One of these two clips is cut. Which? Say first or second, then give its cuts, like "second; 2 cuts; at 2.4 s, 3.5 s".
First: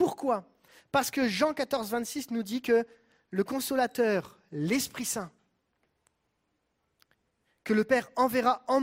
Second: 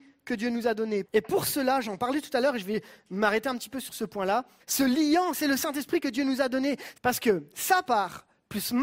second; 3 cuts; at 1.0 s, 4.6 s, 6.9 s